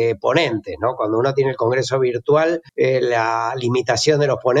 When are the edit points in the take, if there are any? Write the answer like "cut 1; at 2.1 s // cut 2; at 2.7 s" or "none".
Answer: cut 1; at 2.7 s